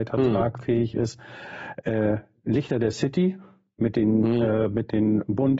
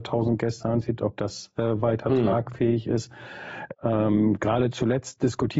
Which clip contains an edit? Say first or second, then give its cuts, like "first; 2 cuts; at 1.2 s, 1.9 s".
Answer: second; 1 cut; at 3.7 s